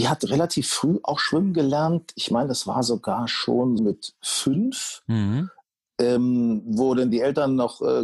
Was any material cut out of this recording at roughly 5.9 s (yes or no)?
no